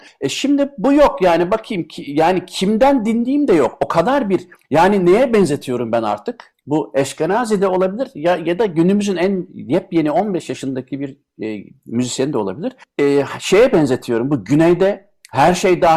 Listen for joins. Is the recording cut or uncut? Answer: uncut